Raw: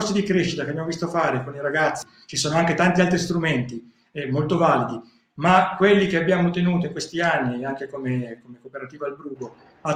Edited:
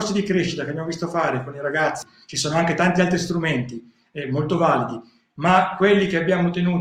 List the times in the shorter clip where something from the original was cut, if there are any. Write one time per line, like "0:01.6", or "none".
none